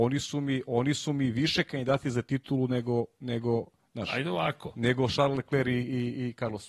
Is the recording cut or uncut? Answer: uncut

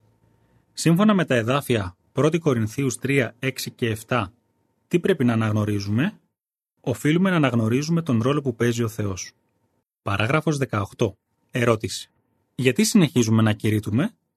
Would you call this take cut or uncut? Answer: cut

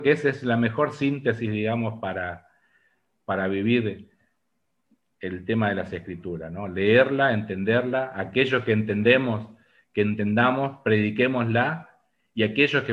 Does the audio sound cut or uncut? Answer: uncut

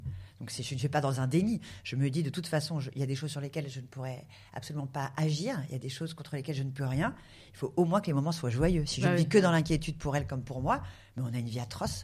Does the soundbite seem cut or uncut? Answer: uncut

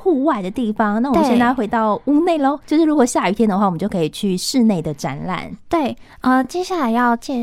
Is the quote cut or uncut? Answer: uncut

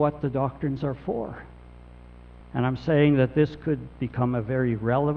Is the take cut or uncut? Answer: cut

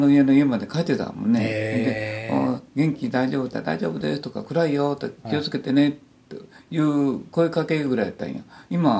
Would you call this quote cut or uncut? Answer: uncut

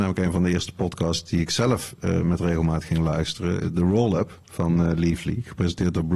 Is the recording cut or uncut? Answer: uncut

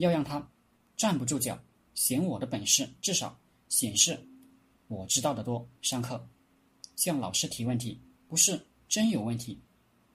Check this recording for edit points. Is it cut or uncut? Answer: cut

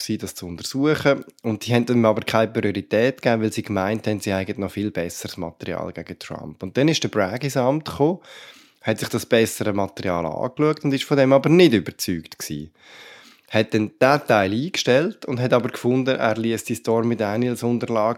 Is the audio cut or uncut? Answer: uncut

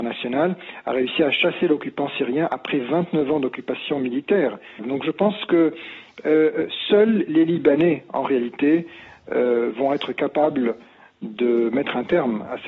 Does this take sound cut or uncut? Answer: cut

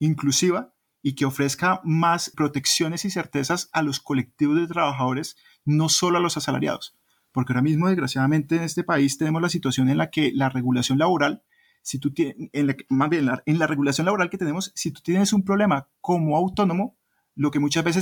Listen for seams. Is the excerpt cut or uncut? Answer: cut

